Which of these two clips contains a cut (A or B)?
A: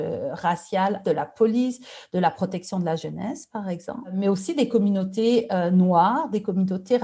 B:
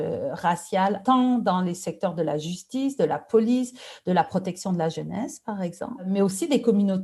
A